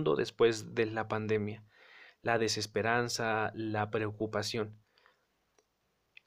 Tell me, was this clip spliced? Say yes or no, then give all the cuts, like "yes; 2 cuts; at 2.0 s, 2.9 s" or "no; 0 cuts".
no; 0 cuts